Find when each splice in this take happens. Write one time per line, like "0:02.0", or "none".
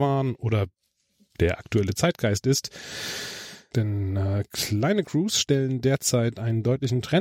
0:03.7